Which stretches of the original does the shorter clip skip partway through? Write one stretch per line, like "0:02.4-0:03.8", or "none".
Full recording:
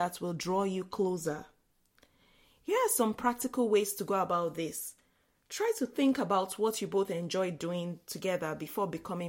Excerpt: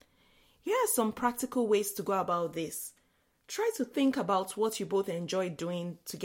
none